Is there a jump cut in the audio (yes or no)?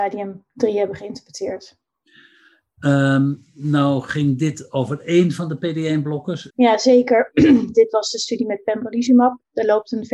yes